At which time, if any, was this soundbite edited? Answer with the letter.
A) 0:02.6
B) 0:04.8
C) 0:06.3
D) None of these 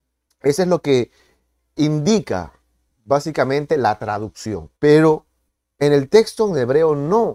B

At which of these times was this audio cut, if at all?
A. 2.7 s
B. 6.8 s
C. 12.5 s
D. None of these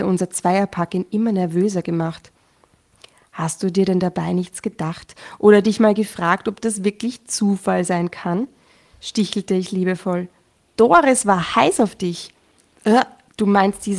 D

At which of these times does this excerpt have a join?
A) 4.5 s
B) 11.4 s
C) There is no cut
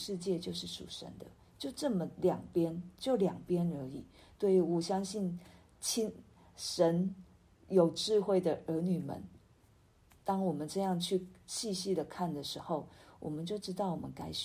C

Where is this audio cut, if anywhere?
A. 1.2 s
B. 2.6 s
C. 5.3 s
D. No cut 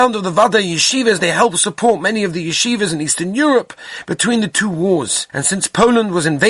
C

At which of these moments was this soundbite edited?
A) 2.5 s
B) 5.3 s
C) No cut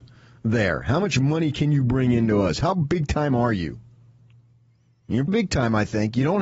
B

